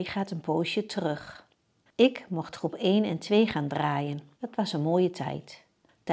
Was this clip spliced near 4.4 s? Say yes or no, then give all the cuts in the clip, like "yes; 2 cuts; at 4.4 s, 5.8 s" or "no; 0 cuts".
yes; 2 cuts; at 1.9 s, 4.4 s